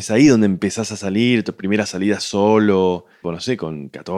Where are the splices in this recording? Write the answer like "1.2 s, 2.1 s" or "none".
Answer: 3.2 s